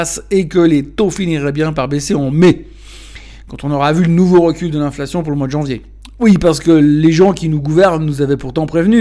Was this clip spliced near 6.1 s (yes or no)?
no